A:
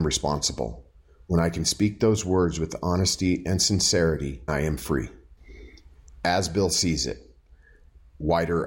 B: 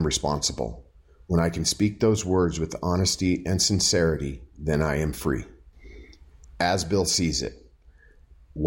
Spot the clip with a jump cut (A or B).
A